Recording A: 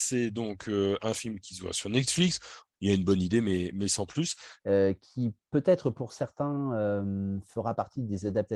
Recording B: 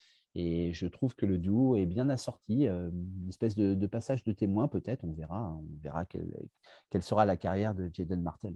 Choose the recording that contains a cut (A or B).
A